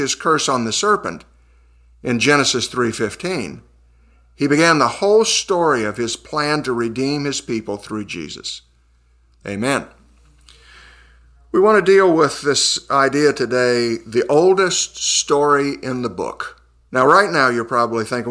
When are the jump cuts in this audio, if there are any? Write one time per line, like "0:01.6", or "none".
0:09.4
0:16.9